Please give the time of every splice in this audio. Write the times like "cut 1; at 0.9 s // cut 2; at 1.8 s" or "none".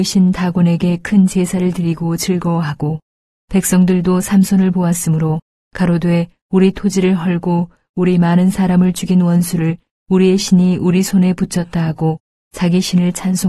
none